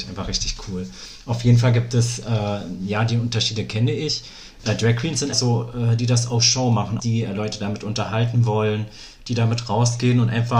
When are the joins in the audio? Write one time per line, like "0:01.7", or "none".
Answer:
0:05.3
0:07.0